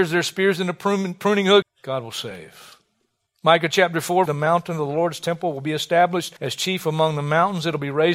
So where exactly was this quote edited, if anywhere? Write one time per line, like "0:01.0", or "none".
0:01.6
0:04.3
0:06.4